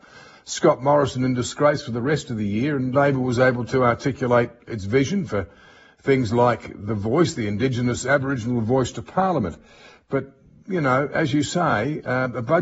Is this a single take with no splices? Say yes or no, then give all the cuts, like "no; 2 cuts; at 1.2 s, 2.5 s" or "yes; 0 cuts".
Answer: yes; 0 cuts